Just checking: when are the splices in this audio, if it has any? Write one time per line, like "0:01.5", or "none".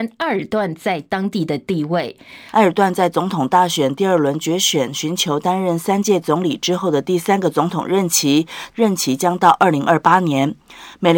0:02.5
0:08.7